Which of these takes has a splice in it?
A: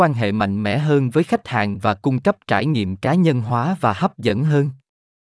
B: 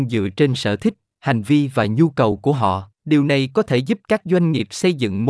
B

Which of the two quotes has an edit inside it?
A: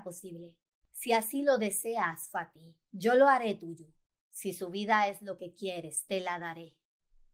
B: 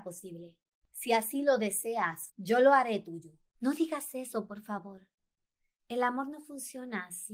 B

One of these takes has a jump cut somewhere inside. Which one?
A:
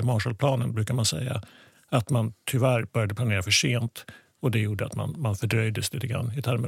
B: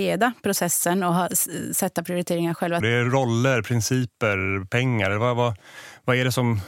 B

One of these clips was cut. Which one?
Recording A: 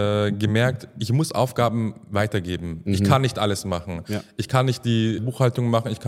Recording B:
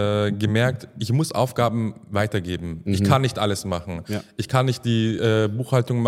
A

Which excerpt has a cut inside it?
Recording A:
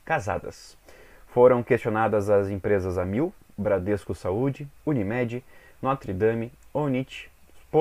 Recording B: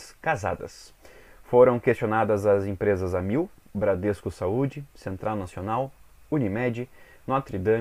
A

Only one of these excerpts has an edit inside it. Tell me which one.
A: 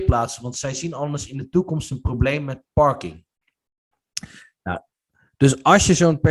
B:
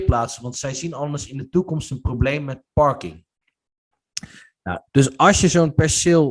B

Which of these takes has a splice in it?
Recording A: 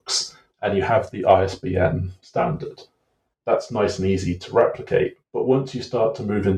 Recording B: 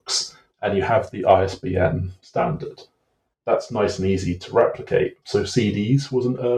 B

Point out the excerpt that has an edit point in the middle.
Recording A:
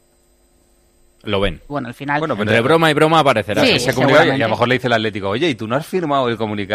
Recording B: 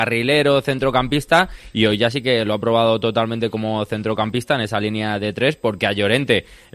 A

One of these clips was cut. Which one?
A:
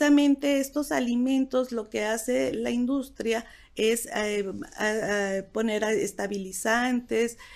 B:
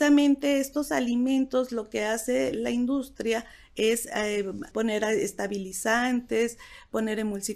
B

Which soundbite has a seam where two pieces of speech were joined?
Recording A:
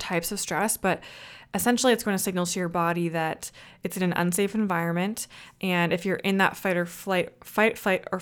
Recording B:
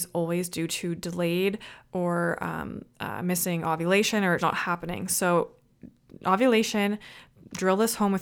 B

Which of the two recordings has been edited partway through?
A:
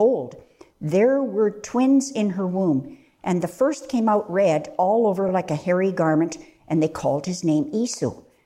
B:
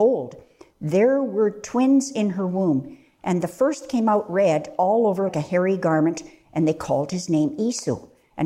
B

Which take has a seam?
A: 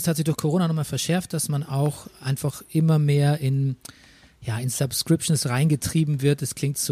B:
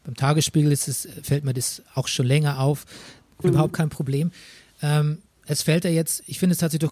B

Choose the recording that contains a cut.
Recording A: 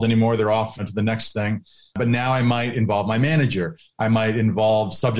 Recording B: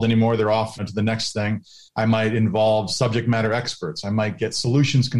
B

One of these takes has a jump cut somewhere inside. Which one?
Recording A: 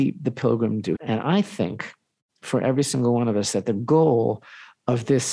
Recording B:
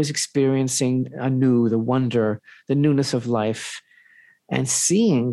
A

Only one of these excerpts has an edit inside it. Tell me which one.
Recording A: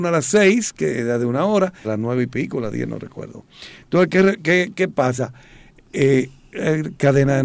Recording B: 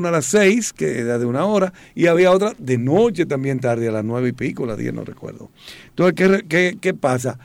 A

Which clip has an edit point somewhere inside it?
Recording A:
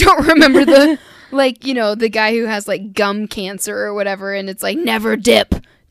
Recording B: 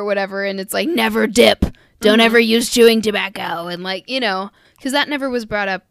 B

